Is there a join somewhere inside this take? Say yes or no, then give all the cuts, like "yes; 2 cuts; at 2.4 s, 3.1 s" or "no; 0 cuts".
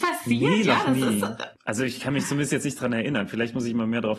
yes; 1 cut; at 1.5 s